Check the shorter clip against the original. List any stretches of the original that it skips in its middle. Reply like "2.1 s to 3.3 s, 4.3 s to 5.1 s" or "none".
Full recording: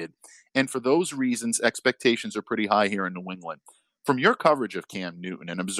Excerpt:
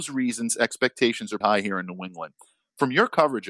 2.4 s to 2.7 s